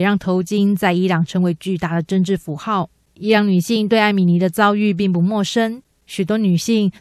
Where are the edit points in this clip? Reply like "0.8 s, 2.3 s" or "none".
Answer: none